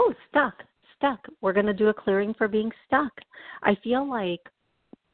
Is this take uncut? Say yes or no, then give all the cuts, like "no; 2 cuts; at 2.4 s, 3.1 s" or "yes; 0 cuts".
yes; 0 cuts